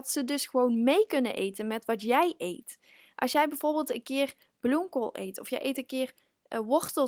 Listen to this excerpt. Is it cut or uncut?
uncut